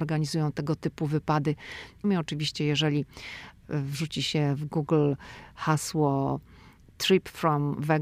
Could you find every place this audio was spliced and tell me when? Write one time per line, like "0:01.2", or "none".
0:02.0